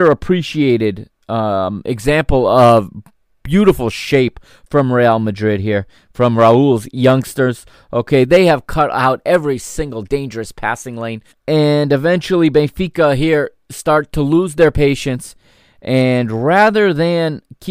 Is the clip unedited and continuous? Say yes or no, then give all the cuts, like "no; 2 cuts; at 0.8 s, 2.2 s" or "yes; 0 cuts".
no; 1 cut; at 11.3 s